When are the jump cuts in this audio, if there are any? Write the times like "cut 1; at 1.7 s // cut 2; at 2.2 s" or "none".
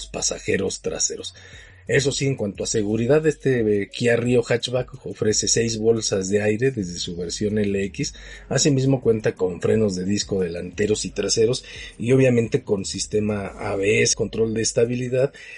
cut 1; at 14.1 s